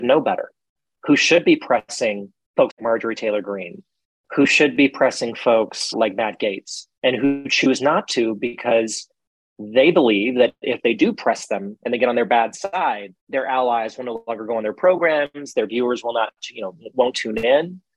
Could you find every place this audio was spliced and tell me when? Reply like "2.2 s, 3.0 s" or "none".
2.7 s, 5.9 s, 13.2 s